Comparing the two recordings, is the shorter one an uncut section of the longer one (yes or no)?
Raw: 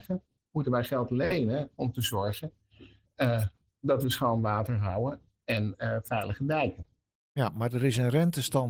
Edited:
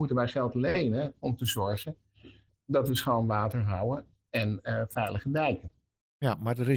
no